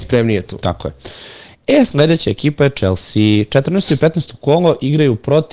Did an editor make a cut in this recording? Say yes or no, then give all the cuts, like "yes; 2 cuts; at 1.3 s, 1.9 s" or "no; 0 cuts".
no; 0 cuts